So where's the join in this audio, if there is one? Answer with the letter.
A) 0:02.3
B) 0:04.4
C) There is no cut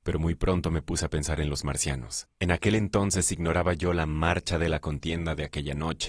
A